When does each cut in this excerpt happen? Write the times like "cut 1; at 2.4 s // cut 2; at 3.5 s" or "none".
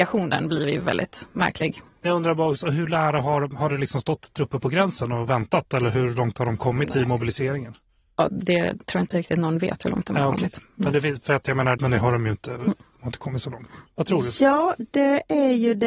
cut 1; at 8.3 s // cut 2; at 11.8 s // cut 3; at 13.9 s